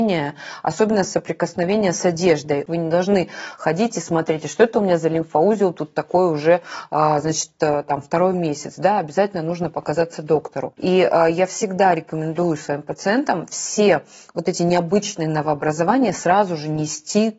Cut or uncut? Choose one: cut